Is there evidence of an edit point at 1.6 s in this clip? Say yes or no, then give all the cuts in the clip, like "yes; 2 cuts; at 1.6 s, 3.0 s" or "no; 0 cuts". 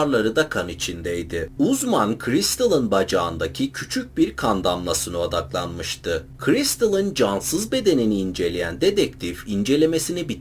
yes; 2 cuts; at 1.6 s, 6.4 s